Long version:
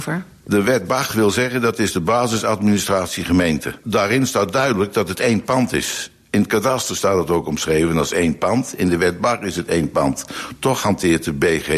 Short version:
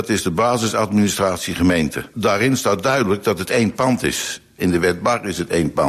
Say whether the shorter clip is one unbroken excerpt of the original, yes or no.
no